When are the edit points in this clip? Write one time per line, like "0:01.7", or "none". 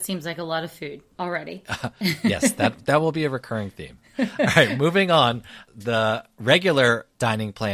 0:01.1

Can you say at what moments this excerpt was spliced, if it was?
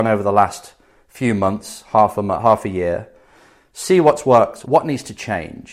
0:04.7

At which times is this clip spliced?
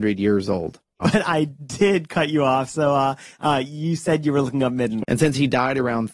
0:01.0
0:05.0

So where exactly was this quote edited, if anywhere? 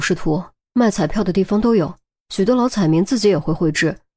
none

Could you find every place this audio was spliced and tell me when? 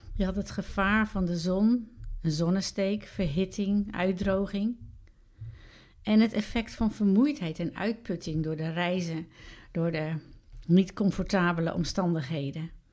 none

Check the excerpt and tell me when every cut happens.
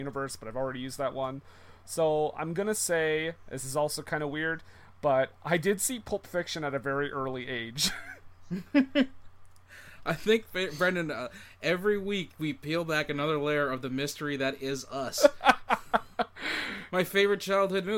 none

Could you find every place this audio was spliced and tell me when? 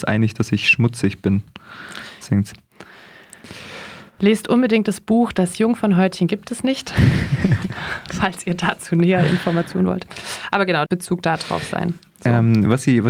0:02.5
0:10.9

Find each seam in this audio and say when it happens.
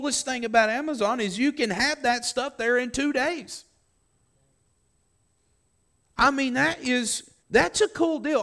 0:07.4

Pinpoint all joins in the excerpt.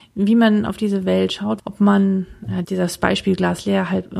0:01.6
0:02.6

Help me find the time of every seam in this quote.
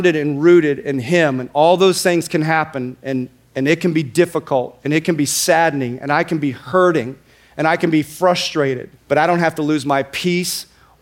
0:09.0

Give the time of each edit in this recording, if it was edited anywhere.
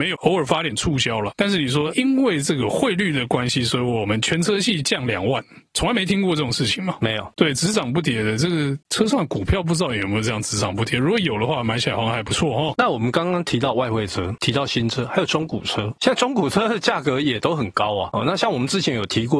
0:01.9

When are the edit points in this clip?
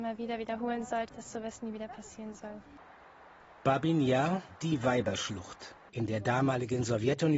0:01.1
0:05.9

